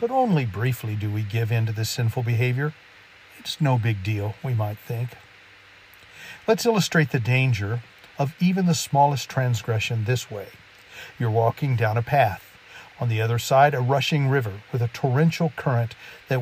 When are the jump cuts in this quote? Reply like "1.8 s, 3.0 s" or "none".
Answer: 12.9 s